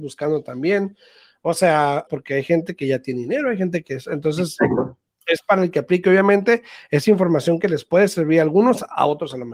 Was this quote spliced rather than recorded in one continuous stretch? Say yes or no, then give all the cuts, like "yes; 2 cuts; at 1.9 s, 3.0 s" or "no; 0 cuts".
yes; 1 cut; at 2.1 s